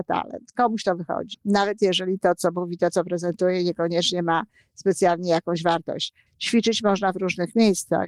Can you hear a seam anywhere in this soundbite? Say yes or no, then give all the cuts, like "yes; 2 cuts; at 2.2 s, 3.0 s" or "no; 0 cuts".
yes; 2 cuts; at 1.3 s, 6.3 s